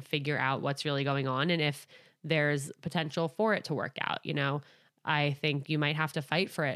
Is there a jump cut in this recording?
no; 0 cuts

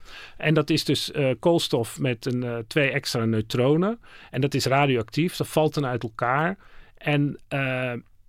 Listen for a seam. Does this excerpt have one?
no; 0 cuts

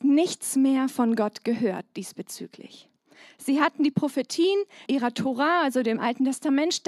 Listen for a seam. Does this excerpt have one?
yes; 1 cut; at 4.8 s

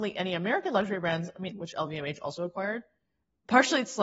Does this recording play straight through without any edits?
no; 1 cut; at 1.5 s

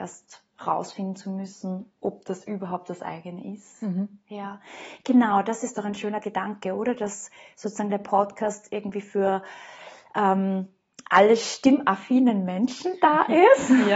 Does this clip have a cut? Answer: no; 0 cuts

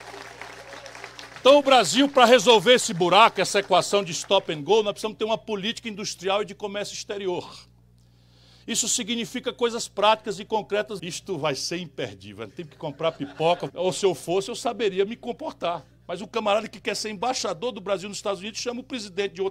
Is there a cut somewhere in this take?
yes; 2 cuts; at 11.0 s, 13.7 s

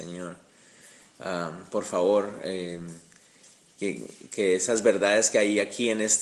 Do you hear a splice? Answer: no; 0 cuts

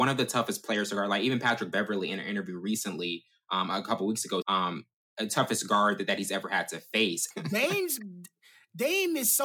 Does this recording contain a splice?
yes; 2 cuts; at 4.4 s, 7.3 s

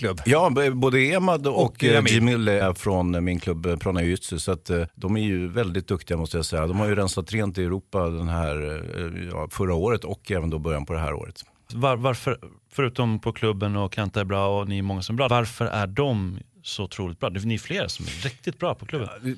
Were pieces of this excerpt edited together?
yes; 3 cuts; at 2.6 s, 11.7 s, 15.3 s

